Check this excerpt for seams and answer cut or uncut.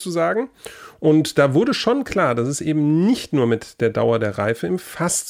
uncut